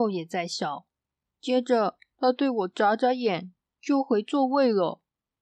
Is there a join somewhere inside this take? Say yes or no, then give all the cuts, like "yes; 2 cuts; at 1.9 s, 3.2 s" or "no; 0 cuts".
yes; 1 cut; at 1.2 s